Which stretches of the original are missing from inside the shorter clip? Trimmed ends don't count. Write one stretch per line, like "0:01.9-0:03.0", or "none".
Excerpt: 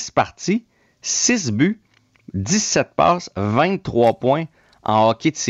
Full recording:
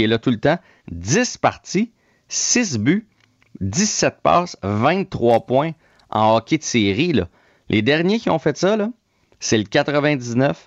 none